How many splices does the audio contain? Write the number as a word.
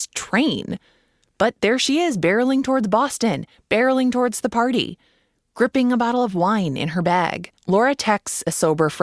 one